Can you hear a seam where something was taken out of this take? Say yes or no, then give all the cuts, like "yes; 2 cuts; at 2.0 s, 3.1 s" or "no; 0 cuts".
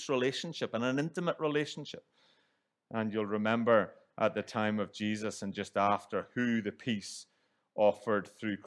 no; 0 cuts